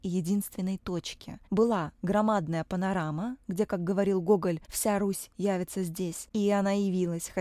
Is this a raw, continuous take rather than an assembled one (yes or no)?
yes